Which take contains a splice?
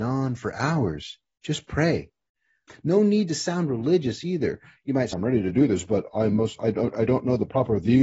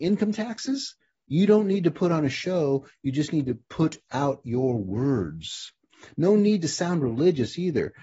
first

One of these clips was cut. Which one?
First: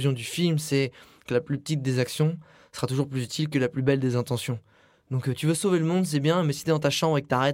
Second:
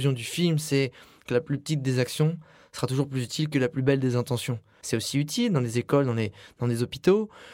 second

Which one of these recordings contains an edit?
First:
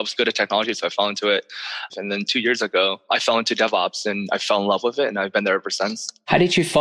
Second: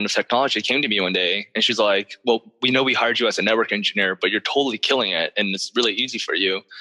first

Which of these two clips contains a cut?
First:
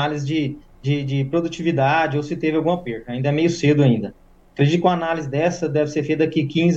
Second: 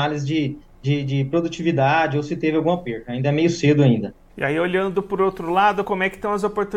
second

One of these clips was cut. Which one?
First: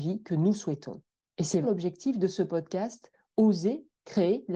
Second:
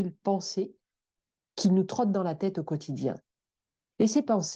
first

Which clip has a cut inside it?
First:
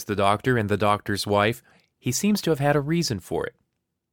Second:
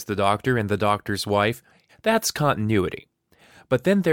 second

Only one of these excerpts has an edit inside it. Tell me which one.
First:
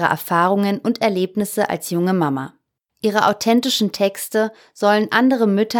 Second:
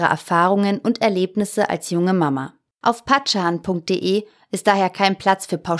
second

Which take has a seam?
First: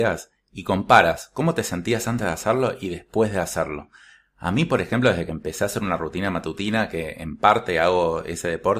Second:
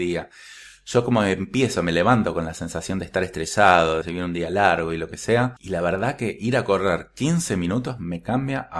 second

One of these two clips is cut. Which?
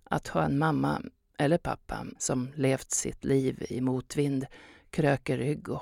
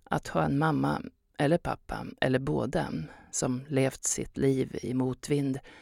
first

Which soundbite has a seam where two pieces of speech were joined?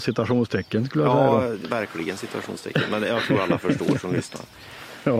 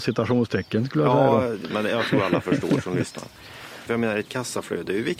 second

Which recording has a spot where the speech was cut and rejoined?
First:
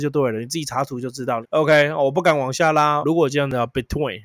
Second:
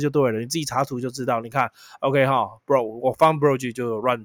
first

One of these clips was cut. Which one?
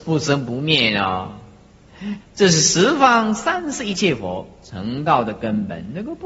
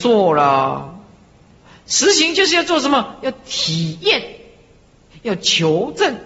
first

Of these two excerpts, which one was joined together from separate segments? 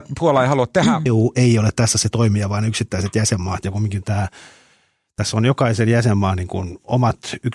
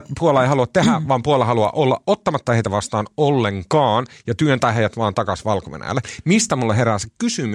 first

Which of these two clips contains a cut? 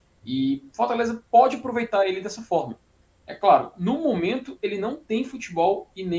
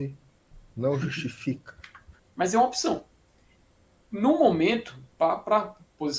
second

